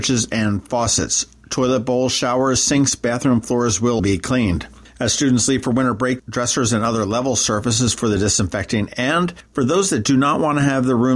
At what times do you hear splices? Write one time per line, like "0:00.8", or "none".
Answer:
0:04.0
0:06.2